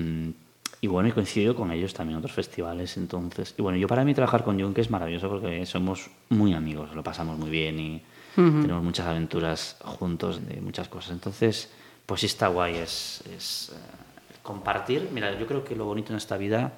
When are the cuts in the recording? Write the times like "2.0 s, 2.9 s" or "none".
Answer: 10.3 s

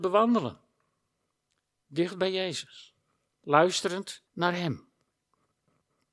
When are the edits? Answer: 4.3 s

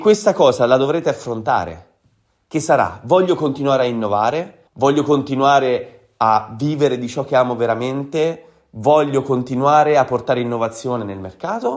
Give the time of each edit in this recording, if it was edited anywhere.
4.7 s

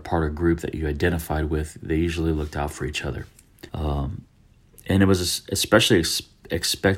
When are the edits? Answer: 3.7 s

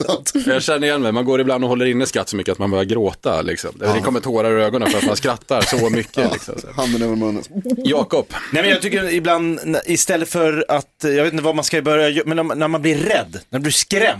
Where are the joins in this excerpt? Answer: none

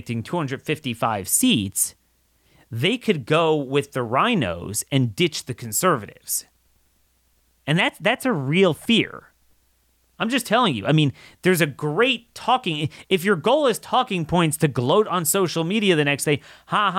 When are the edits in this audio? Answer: none

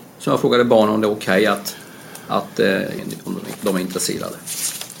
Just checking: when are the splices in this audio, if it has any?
3.0 s

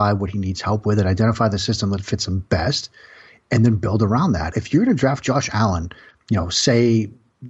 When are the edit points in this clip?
4.5 s

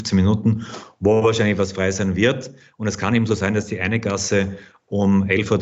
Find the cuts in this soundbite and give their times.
none

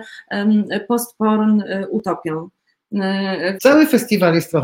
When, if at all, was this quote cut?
3.6 s

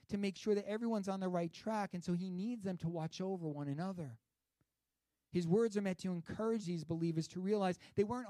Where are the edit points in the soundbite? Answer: none

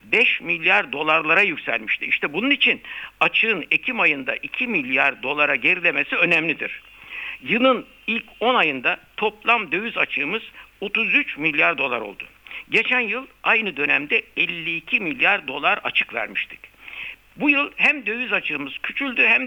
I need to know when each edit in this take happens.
17.1 s

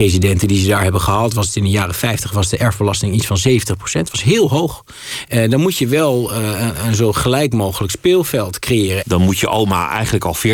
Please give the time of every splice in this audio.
5.2 s, 9.0 s

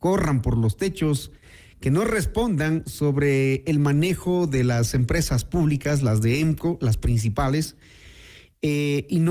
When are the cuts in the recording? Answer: none

